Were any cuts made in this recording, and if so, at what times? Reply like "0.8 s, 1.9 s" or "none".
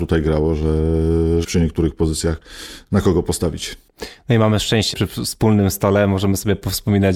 1.4 s, 4.9 s